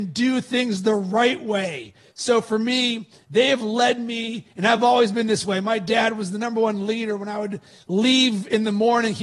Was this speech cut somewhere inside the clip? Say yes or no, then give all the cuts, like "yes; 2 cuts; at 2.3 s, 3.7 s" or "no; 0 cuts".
no; 0 cuts